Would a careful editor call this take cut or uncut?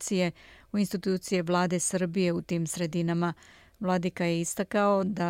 uncut